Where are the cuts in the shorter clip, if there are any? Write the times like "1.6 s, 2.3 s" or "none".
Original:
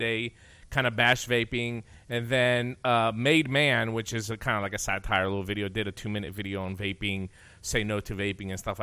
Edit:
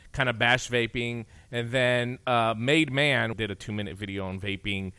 3.3 s